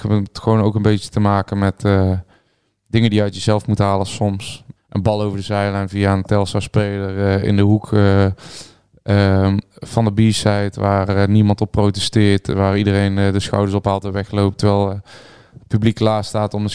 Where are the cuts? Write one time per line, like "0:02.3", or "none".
0:04.8